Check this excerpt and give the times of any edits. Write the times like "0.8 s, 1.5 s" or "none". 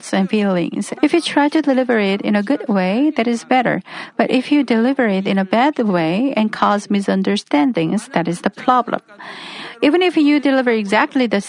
1.0 s